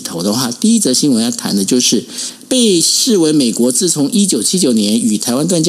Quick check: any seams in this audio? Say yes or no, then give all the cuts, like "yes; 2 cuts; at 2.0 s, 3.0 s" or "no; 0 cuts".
no; 0 cuts